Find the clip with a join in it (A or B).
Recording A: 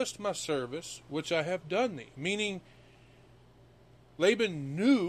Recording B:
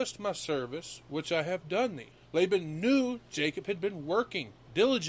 B